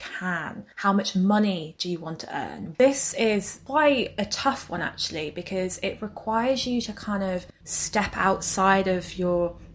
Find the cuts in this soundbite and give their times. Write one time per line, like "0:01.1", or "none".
0:02.7